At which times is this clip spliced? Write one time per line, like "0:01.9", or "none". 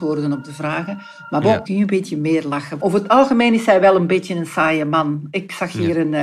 0:01.6
0:02.8

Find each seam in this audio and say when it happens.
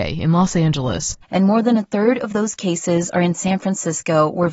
0:01.2

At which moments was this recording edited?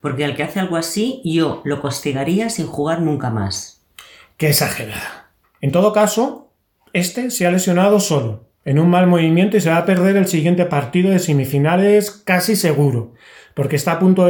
0:05.4

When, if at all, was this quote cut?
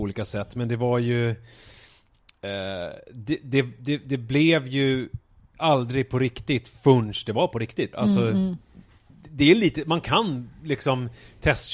0:07.9

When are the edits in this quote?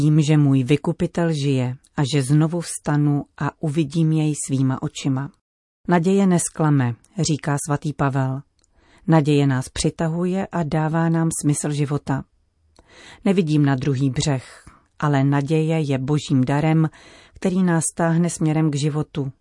none

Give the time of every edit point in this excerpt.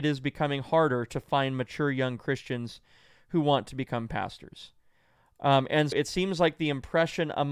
0:05.9

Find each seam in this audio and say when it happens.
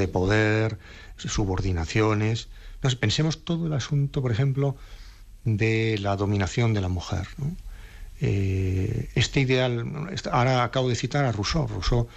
none

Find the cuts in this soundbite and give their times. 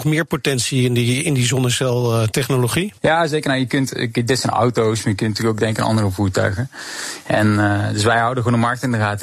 0:03.0

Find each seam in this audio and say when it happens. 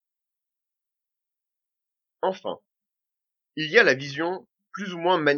none

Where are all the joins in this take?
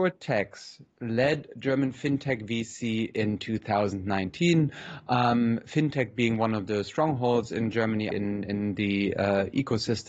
0:08.1

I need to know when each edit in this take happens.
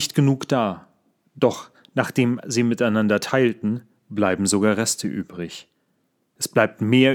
none

